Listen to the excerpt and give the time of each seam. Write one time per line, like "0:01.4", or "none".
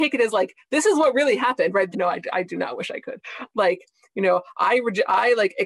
0:01.9
0:03.5

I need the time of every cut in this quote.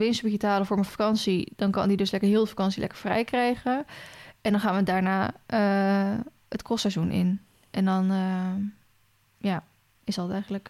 none

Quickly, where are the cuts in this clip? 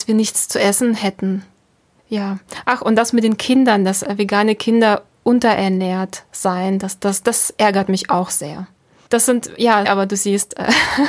0:09.8

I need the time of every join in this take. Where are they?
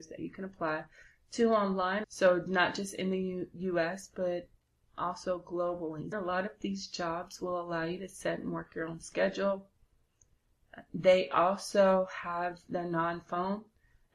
0:02.0
0:06.1

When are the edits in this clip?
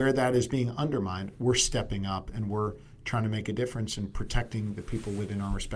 none

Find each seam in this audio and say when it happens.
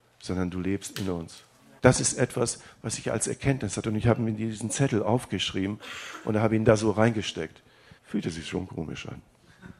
0:01.8
0:08.0

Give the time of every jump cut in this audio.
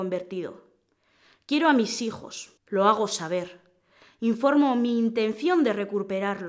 0:02.6

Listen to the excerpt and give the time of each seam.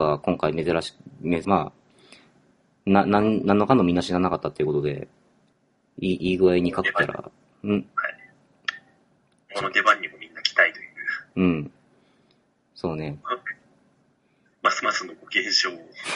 0:01.4
0:13.2

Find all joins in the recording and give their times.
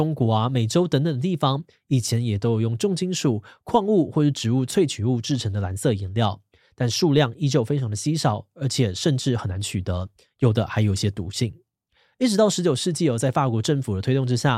none

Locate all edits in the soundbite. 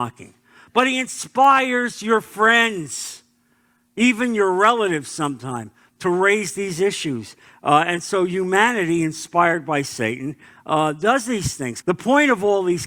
0:11.8

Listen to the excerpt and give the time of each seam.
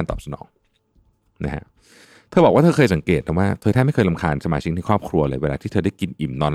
none

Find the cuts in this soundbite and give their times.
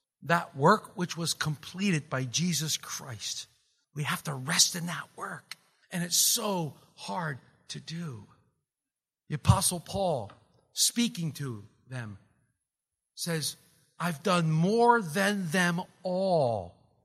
none

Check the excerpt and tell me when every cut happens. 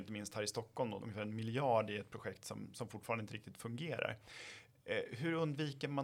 0:01.0

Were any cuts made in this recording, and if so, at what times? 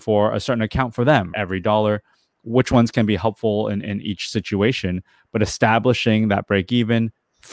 0:01.3

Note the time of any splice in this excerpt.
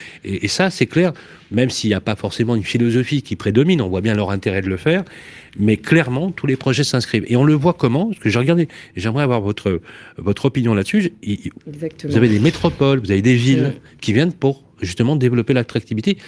0:11.6

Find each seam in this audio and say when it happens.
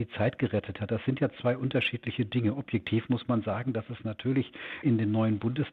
0:04.8

